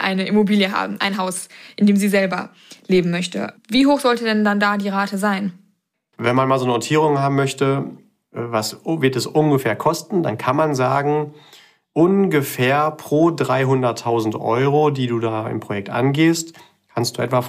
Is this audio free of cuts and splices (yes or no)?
no